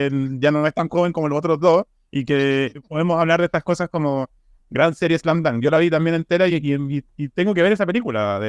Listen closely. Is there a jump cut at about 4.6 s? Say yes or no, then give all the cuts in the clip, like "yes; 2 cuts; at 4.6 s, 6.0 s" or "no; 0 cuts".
yes; 1 cut; at 4.6 s